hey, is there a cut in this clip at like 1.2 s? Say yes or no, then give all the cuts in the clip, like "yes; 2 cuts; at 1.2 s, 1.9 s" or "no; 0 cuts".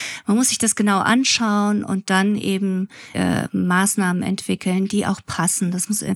no; 1 cut; at 3.1 s